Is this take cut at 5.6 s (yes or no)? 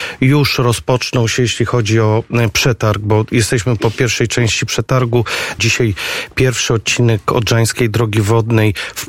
yes